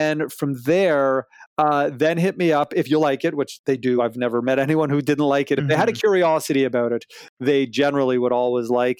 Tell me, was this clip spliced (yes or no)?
no